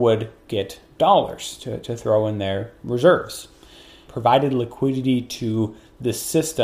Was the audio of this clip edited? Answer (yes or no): yes